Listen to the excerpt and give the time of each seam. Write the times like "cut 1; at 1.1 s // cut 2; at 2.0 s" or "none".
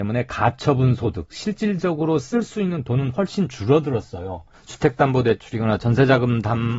cut 1; at 4.5 s